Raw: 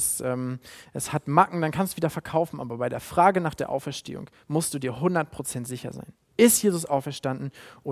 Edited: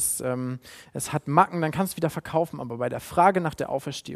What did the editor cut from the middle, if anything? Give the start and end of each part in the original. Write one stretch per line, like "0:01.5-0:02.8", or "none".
none